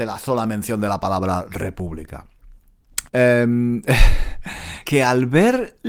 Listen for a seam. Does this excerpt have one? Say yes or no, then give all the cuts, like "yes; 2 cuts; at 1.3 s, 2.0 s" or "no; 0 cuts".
yes; 2 cuts; at 3.1 s, 4.8 s